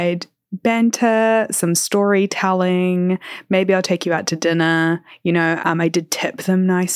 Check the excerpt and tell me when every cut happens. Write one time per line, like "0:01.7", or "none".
0:05.6